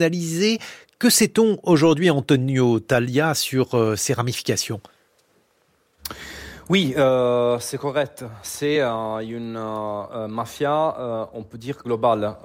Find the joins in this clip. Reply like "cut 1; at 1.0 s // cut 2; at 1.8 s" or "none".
none